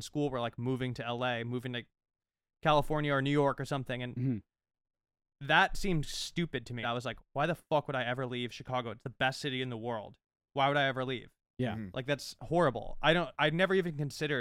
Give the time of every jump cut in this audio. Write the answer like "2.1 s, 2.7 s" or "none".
6.8 s